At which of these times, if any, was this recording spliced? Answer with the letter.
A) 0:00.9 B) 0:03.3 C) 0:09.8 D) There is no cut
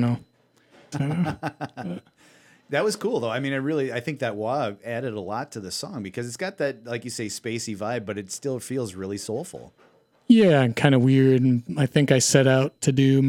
A